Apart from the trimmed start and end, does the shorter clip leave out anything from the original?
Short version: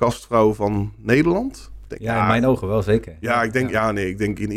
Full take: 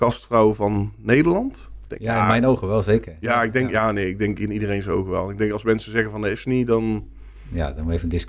no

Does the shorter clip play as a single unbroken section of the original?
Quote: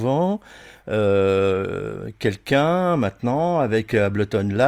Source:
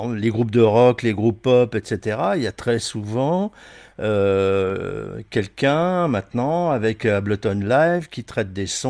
yes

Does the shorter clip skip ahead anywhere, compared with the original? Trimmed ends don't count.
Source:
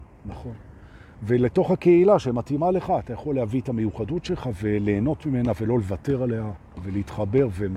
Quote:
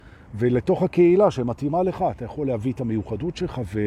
no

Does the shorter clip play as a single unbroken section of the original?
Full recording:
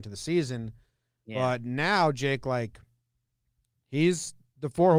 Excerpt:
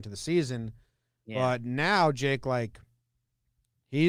yes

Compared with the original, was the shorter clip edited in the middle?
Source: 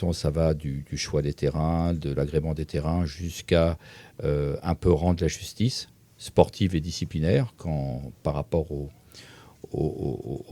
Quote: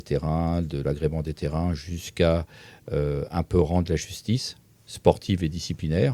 no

